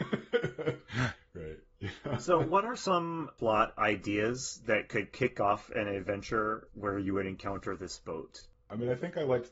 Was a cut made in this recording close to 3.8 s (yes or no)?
yes